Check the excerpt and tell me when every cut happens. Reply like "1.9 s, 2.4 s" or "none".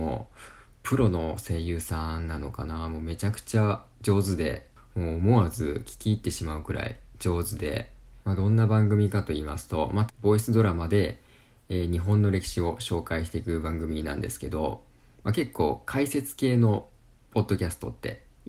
8.2 s, 10.1 s